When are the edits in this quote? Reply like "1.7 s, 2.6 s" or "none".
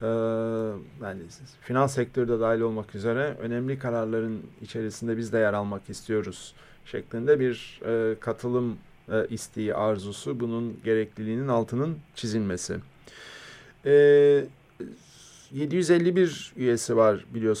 none